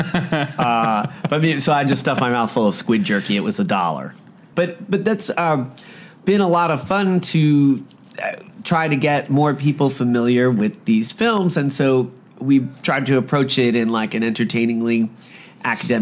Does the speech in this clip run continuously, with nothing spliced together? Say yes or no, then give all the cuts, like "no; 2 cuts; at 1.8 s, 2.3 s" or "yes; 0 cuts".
no; 1 cut; at 4.5 s